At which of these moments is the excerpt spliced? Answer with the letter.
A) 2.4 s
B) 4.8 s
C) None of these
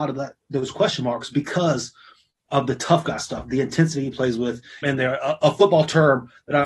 B